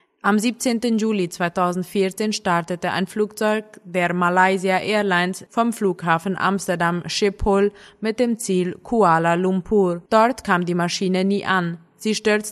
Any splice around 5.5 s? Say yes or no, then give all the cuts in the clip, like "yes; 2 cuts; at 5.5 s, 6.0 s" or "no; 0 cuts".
yes; 2 cuts; at 5.5 s, 10.1 s